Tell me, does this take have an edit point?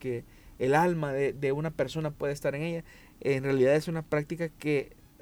no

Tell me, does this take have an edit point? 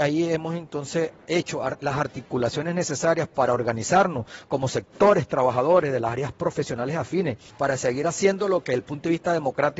no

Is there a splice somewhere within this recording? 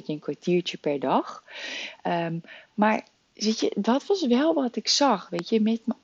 no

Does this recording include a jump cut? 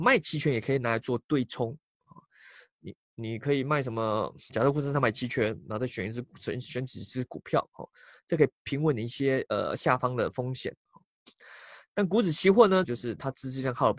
yes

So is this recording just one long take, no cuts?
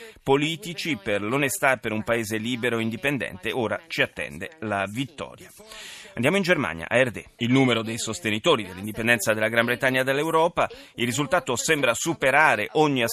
no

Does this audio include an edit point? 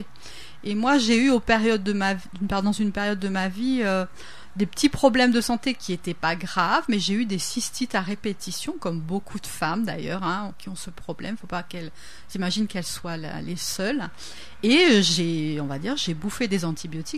no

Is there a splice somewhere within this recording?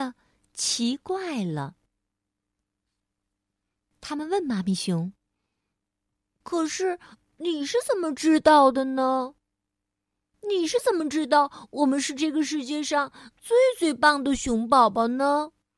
no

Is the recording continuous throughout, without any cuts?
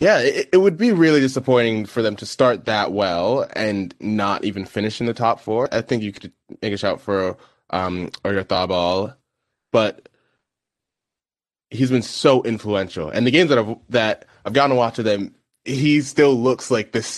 no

